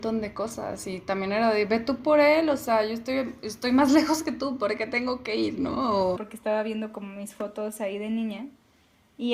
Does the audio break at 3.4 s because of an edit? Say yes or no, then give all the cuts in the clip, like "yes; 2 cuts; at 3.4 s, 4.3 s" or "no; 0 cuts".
no; 1 cut; at 6.2 s